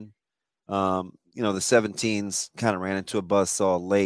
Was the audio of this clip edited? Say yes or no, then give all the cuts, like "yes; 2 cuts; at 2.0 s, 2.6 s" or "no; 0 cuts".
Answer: no; 0 cuts